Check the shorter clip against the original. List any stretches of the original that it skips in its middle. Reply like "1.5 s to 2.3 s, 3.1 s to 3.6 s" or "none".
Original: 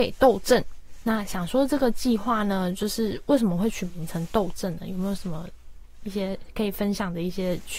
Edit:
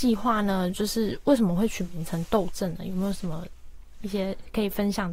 none

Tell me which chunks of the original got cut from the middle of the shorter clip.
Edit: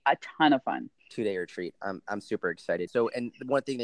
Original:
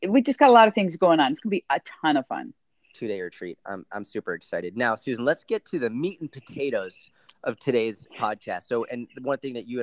2.6 s to 2.8 s, 4.7 s to 8.6 s

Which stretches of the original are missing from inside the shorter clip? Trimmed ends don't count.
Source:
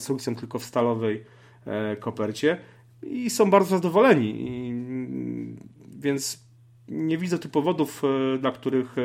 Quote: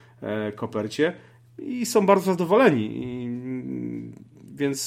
none

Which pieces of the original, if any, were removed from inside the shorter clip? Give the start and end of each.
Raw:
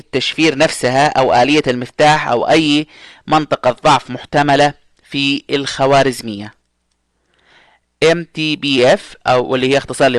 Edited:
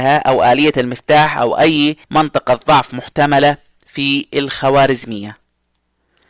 2.9 s to 3.2 s

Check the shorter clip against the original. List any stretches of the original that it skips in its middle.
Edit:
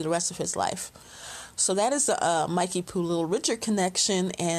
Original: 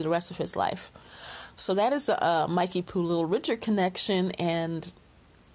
none

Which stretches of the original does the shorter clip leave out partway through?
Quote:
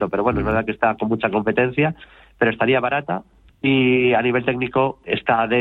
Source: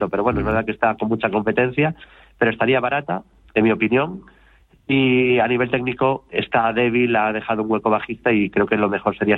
3.5 s to 4.7 s

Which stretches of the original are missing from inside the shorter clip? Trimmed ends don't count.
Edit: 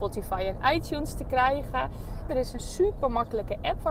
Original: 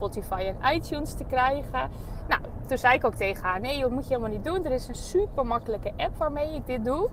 2.3 s to 4.6 s

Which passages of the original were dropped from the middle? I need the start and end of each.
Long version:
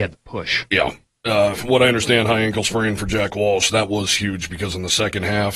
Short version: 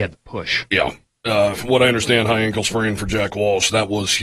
none

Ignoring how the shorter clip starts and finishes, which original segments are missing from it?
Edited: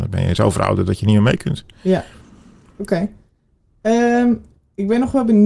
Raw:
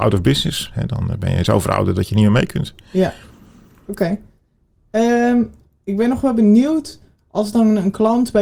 none

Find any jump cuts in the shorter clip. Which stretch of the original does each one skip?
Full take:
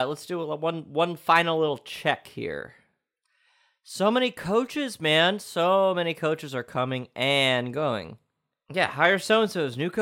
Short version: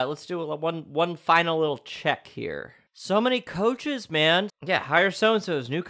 2.9 s to 3.8 s, 5.4 s to 8.6 s

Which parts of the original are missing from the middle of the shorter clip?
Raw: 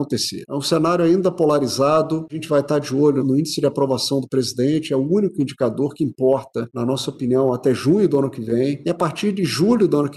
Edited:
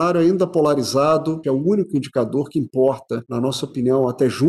2.3 s to 4.9 s

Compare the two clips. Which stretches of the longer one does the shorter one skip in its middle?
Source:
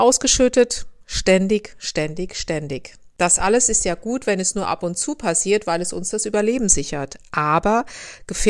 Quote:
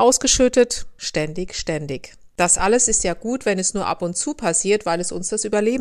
1.0 s to 1.8 s

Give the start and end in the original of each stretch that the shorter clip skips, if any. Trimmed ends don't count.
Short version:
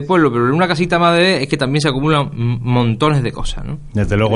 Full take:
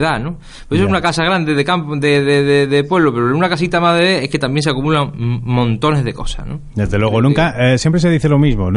none

